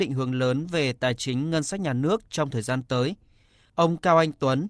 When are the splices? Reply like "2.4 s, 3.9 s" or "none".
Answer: none